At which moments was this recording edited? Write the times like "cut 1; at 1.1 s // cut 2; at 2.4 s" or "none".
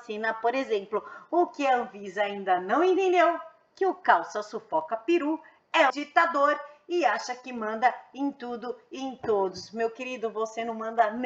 cut 1; at 5.9 s